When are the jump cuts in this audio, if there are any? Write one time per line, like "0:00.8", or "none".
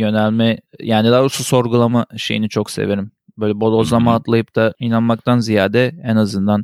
none